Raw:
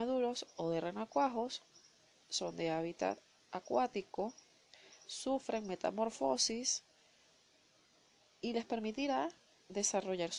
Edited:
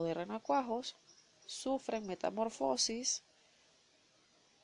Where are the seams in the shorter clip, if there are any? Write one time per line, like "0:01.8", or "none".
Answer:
0:01.4